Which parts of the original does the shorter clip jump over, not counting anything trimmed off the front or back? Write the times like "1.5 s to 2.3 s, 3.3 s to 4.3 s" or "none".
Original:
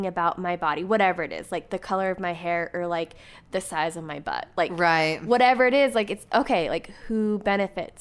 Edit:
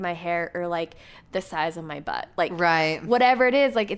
none